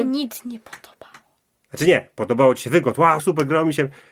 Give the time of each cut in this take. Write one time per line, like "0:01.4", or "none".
0:03.2